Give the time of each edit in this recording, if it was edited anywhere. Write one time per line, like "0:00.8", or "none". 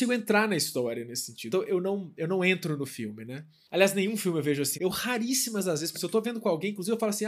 0:01.5
0:04.7
0:05.9